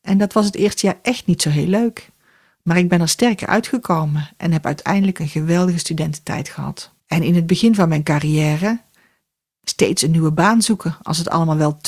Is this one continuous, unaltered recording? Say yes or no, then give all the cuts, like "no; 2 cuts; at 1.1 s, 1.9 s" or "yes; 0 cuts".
no; 2 cuts; at 2.6 s, 7.0 s